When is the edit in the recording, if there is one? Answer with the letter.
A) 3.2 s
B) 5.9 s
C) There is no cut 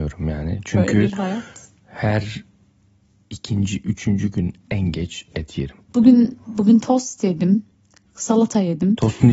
B